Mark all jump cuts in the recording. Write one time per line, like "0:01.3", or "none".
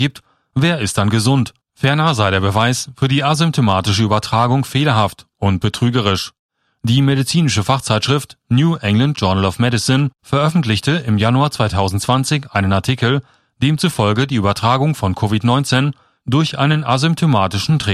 0:01.6